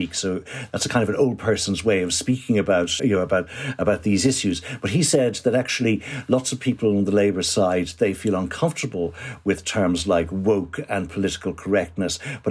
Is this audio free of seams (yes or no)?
no